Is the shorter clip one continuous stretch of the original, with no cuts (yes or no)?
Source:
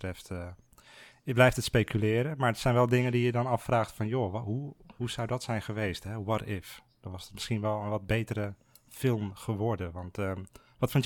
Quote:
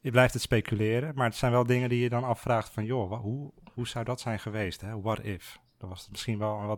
yes